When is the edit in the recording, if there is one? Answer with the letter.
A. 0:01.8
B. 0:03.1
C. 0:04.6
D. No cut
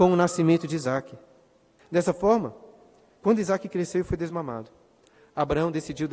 A